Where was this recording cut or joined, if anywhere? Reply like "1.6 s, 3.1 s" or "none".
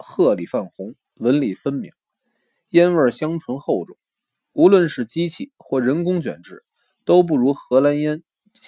1.0 s